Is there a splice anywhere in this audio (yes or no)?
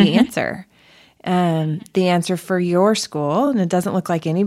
no